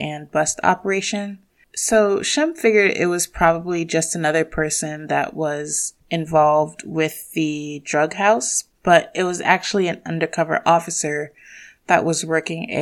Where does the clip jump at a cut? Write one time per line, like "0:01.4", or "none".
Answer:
0:01.6
0:06.0
0:08.7